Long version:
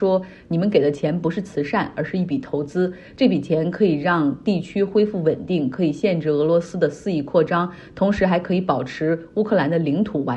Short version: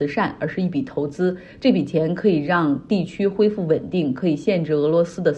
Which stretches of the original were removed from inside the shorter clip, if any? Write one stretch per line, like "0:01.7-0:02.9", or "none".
none